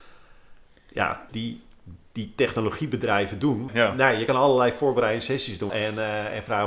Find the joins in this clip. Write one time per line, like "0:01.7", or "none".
0:01.3
0:03.7
0:05.7